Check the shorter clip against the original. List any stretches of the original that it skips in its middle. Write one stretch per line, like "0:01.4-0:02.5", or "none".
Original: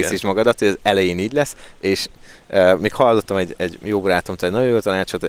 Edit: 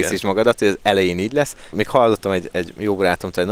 0:01.7-0:02.8

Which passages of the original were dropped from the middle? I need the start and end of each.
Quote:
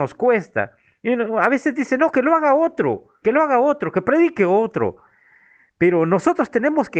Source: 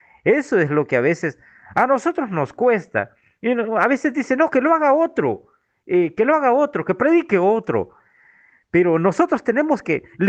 0:05.6-0:06.1

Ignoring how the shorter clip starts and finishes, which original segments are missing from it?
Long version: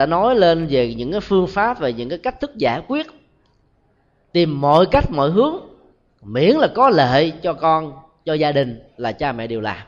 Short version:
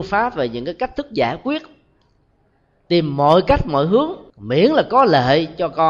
0:05.7-0:06.2

